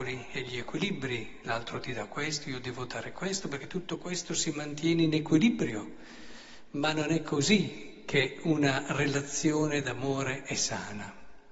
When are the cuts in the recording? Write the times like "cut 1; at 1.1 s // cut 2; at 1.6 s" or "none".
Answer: none